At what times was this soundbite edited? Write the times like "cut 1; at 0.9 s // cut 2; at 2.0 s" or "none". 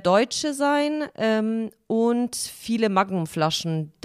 none